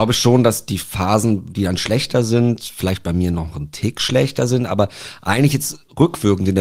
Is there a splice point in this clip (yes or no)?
no